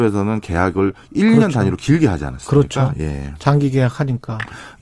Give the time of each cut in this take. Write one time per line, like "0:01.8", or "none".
none

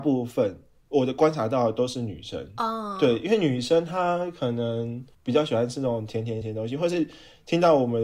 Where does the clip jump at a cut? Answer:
0:05.1
0:06.4

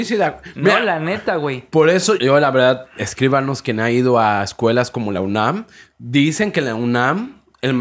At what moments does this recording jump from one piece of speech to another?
0:02.2

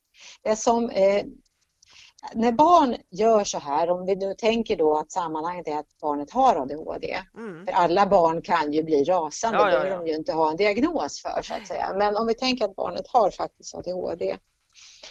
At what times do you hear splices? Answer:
none

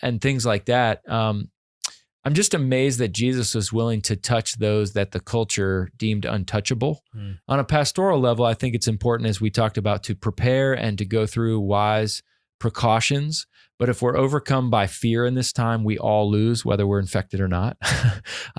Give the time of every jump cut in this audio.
0:07.4

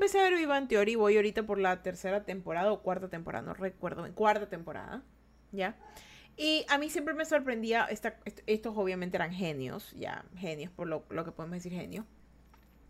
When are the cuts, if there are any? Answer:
none

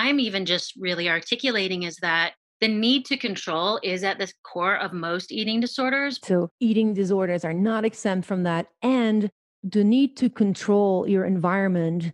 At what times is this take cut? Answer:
0:06.2

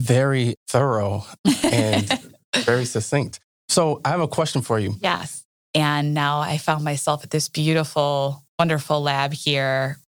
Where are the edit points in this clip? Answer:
0:05.6
0:08.5

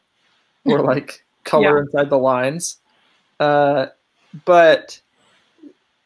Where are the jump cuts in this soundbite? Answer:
none

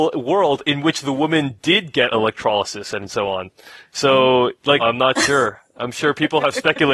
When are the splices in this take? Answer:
0:04.8

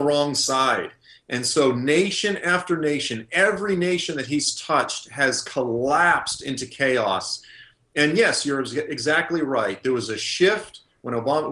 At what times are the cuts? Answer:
none

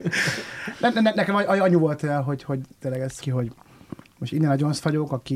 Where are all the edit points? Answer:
0:03.2

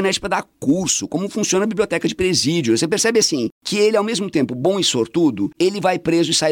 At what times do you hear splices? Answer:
0:05.5

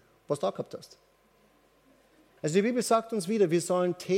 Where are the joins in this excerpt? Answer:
0:02.4

